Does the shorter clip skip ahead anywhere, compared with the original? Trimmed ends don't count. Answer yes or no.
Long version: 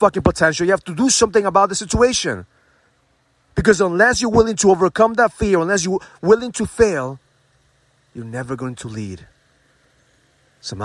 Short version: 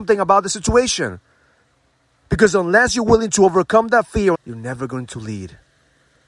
yes